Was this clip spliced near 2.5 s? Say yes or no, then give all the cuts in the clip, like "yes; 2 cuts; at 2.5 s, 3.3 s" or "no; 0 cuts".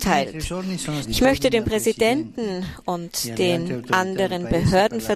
no; 1 cut; at 1.0 s